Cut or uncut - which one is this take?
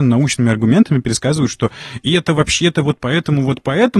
uncut